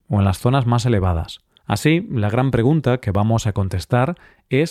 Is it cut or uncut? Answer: cut